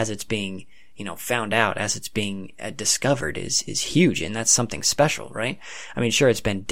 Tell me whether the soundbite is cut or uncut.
uncut